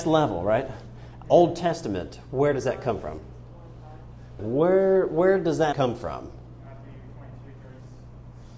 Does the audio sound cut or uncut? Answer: cut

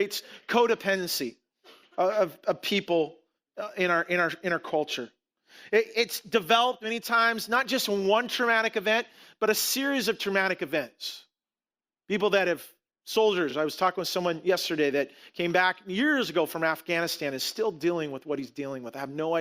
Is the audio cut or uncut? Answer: uncut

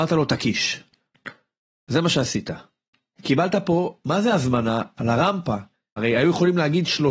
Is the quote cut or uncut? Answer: cut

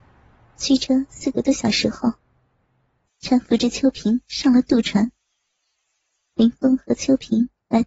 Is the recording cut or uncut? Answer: cut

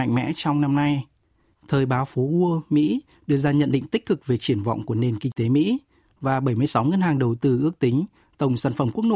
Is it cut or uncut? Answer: uncut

